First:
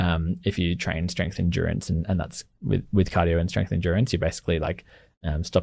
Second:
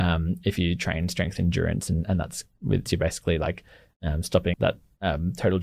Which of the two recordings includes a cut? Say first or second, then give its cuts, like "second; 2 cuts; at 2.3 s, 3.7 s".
second; 2 cuts; at 2.9 s, 4.5 s